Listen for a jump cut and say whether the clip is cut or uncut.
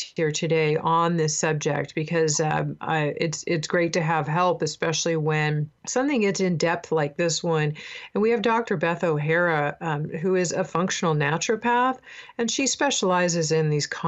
cut